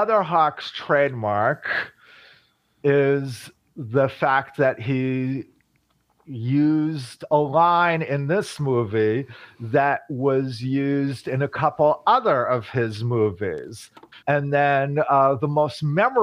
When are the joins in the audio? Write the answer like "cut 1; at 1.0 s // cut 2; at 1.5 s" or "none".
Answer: cut 1; at 14.2 s